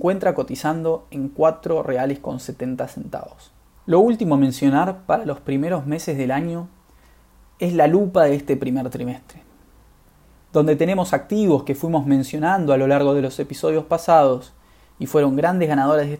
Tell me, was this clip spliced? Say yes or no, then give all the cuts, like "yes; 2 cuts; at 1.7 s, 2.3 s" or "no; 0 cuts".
yes; 1 cut; at 3.8 s